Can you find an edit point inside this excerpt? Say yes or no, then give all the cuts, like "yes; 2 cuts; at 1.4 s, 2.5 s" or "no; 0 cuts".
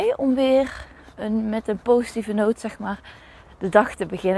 no; 0 cuts